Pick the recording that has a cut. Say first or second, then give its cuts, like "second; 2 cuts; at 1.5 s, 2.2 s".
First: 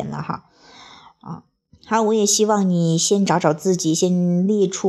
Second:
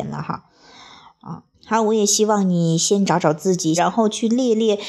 second; 2 cuts; at 1.5 s, 3.8 s